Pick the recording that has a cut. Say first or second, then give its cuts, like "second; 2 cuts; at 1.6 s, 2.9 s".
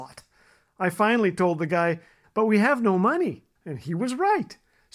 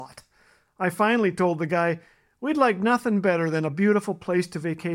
first; 2 cuts; at 2.2 s, 3.6 s